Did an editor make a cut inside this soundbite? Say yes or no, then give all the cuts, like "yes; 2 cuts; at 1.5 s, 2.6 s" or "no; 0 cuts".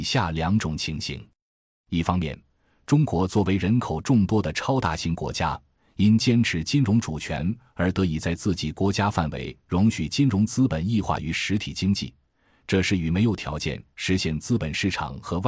no; 0 cuts